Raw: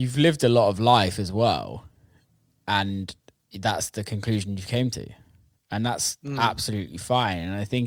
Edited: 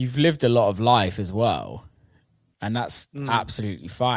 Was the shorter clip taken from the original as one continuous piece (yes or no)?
no